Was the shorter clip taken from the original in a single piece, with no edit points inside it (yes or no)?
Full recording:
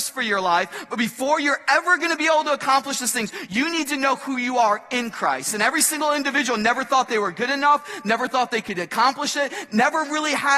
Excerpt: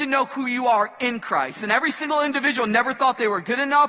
yes